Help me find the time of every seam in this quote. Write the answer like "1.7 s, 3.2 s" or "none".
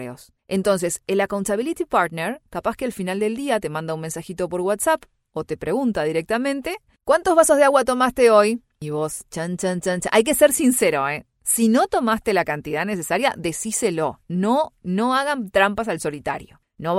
none